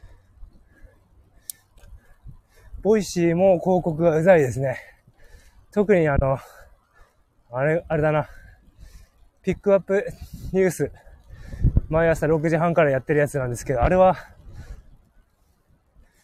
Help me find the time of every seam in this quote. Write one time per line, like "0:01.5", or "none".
none